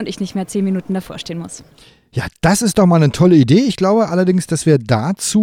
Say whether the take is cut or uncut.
uncut